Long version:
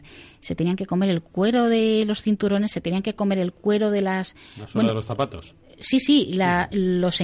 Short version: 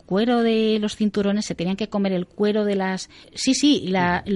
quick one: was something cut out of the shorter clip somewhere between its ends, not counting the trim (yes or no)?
yes